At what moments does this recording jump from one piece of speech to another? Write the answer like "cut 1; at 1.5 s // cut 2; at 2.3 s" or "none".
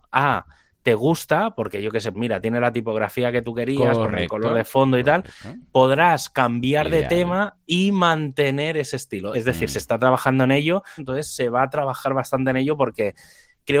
cut 1; at 2.1 s // cut 2; at 9.3 s // cut 3; at 11.0 s

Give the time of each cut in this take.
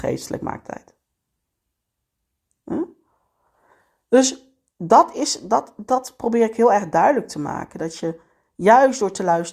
none

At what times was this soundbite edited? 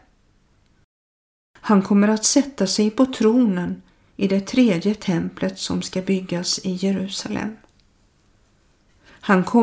none

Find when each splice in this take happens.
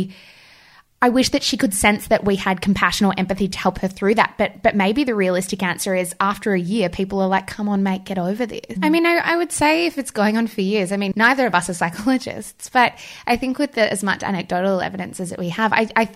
cut 1; at 8.8 s

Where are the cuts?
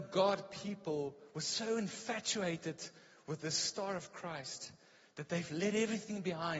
none

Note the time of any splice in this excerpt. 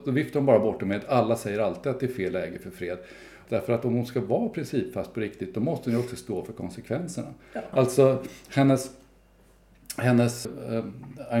cut 1; at 3.5 s // cut 2; at 7.7 s // cut 3; at 10.5 s

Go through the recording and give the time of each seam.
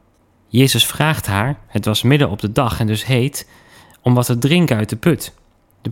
none

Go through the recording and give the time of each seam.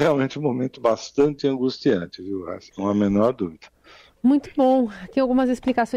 cut 1; at 2.7 s

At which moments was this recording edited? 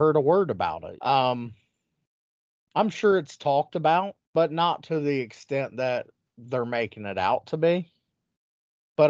cut 1; at 1.0 s // cut 2; at 4.2 s

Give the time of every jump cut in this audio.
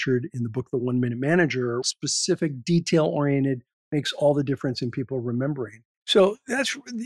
cut 1; at 1.8 s // cut 2; at 6.0 s

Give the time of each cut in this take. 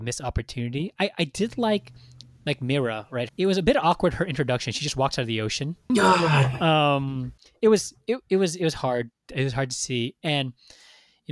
cut 1; at 3.3 s // cut 2; at 5.9 s

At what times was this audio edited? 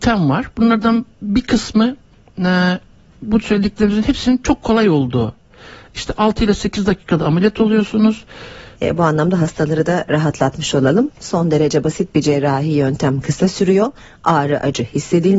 cut 1; at 8.7 s

